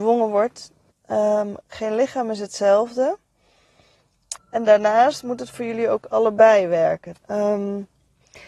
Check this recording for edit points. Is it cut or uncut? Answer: cut